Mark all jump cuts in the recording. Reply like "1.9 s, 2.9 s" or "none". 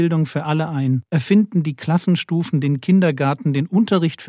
1.1 s